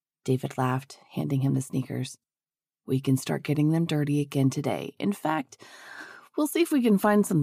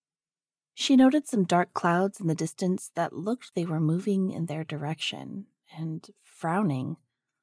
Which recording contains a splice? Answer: second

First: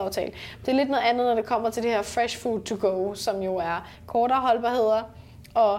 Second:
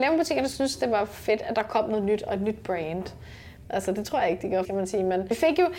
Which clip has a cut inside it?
second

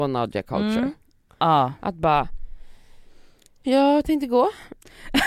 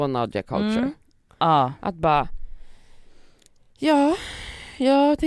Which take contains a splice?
first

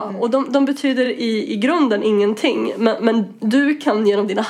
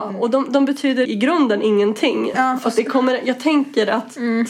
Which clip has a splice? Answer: second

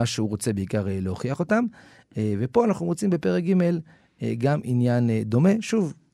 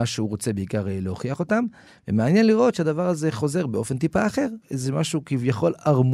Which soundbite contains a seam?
second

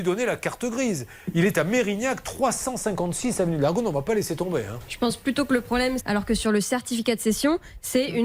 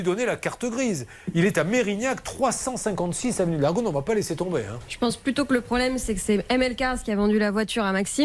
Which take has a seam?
first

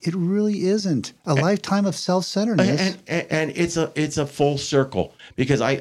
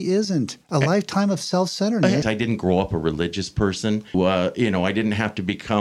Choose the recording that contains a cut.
second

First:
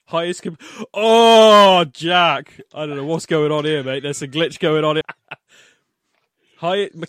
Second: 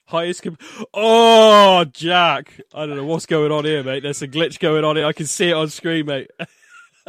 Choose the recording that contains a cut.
first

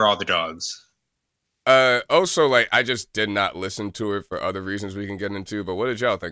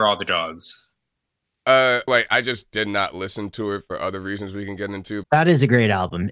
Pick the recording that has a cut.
second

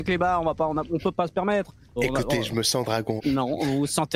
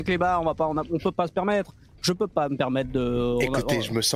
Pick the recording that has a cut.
first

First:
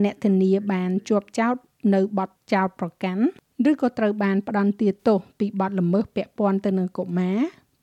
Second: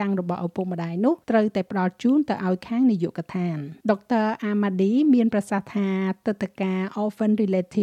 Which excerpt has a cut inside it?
second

